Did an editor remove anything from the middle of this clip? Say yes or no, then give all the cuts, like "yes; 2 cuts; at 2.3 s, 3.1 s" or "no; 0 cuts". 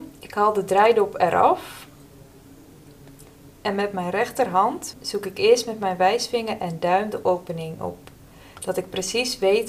yes; 1 cut; at 4.9 s